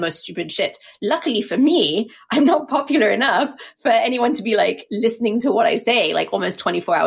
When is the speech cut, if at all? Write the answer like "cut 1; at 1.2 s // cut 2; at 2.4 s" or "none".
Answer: none

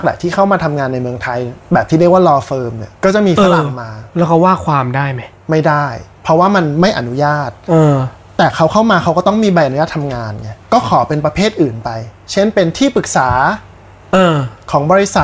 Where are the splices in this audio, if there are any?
cut 1; at 3.0 s // cut 2; at 10.6 s

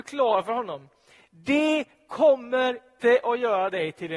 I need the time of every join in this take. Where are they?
cut 1; at 3.0 s

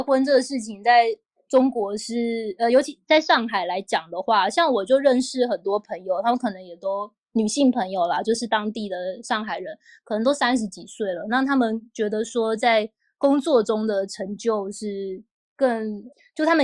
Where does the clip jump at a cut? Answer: none

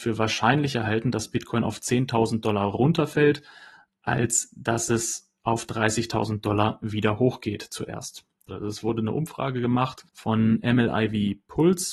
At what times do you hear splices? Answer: cut 1; at 8.5 s // cut 2; at 10.1 s

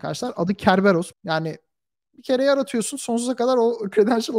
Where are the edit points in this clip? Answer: cut 1; at 1.1 s

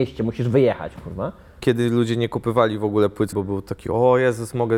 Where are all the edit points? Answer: cut 1; at 1.6 s // cut 2; at 3.3 s

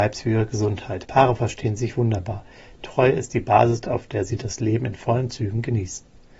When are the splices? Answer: cut 1; at 1.0 s

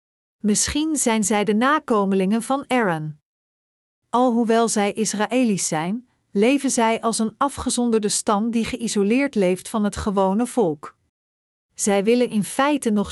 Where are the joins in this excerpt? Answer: cut 1; at 4.0 s // cut 2; at 11.5 s

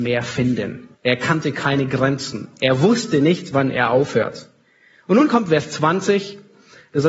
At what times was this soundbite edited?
cut 1; at 0.9 s

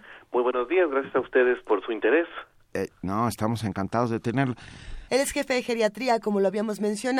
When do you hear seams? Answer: cut 1; at 5.1 s

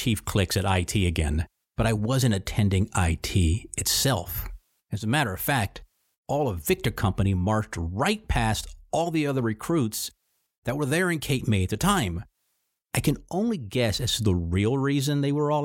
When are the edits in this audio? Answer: none

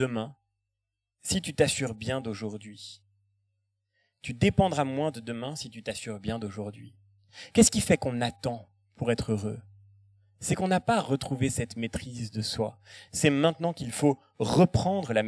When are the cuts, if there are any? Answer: cut 1; at 13.1 s

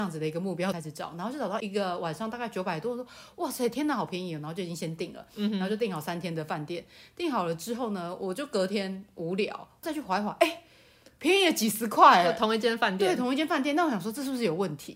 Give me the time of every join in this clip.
none

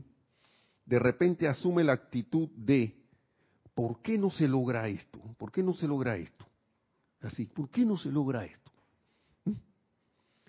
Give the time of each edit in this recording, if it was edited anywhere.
none

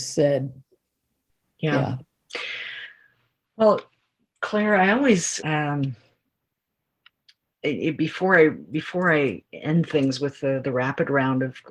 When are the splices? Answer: cut 1; at 5.4 s

